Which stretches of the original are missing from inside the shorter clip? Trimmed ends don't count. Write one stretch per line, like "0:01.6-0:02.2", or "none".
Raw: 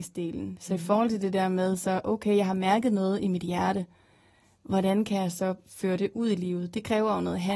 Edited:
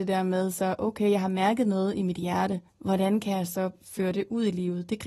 0:03.9-0:04.5